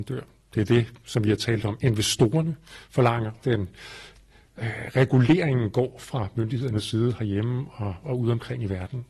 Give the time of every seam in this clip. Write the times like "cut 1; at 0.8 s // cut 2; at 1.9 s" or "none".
cut 1; at 3.4 s